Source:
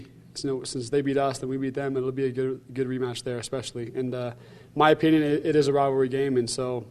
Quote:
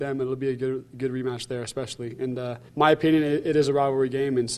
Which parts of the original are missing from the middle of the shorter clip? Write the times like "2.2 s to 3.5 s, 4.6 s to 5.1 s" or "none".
4.4 s to 4.7 s